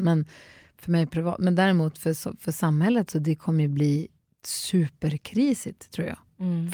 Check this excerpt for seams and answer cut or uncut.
uncut